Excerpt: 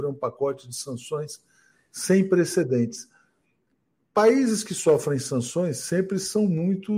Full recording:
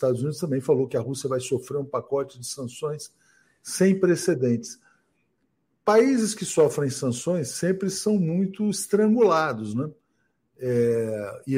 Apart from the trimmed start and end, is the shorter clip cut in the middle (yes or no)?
no